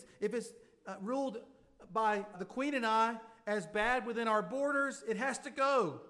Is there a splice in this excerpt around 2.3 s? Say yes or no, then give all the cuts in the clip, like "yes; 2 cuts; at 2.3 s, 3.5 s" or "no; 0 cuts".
yes; 1 cut; at 2.3 s